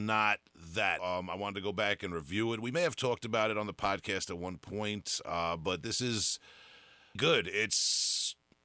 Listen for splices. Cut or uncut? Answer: cut